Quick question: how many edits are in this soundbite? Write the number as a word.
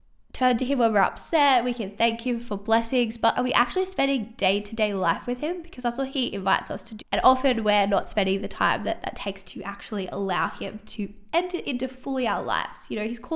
two